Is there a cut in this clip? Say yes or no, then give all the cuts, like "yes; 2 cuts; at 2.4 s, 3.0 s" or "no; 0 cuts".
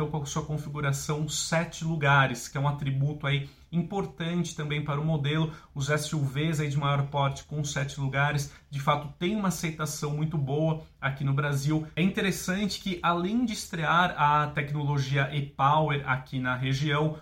no; 0 cuts